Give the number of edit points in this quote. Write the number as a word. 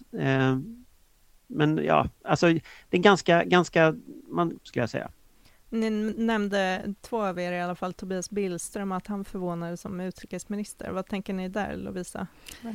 one